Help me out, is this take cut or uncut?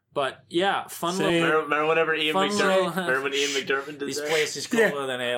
uncut